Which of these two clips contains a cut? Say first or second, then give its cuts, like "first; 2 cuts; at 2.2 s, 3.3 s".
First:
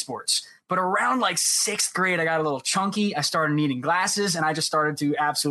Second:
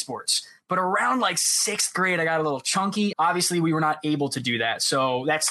second; 1 cut; at 3.1 s